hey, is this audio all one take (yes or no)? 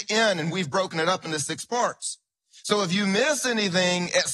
yes